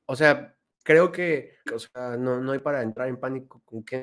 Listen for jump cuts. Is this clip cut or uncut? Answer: cut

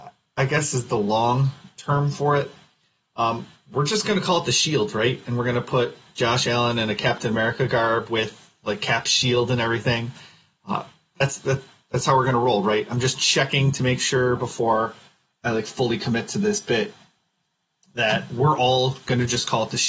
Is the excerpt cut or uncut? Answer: uncut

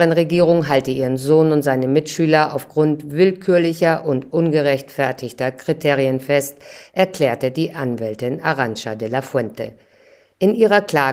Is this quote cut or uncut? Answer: uncut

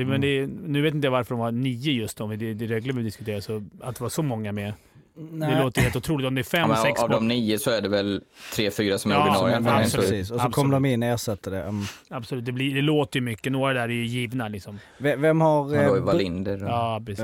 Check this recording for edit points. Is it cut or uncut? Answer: uncut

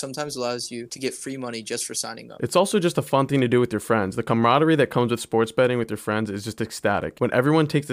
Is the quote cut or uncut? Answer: uncut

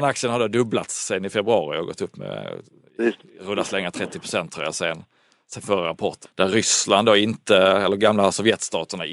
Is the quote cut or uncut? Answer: cut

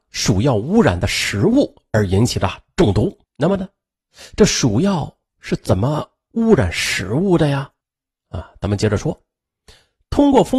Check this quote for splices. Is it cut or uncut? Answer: cut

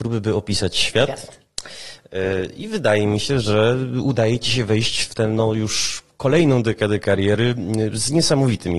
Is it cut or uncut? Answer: uncut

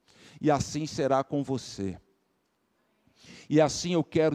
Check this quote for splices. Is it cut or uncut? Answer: uncut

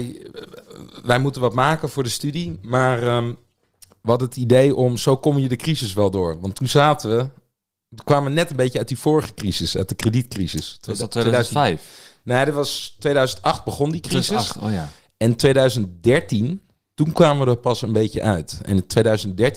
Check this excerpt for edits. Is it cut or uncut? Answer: uncut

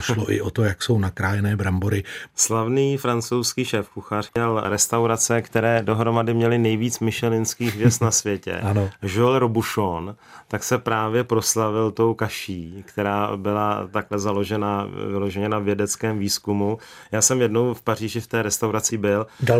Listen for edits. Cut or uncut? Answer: cut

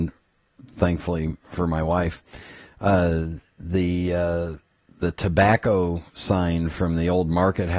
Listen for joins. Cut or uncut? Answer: uncut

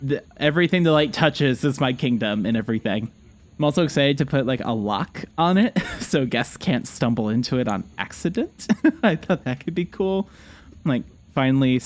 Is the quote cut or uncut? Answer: uncut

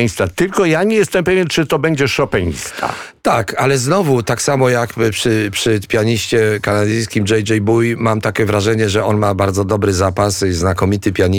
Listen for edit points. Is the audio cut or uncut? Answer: uncut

